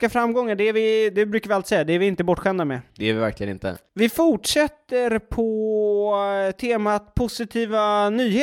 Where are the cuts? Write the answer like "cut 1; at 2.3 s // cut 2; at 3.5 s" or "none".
cut 1; at 2.9 s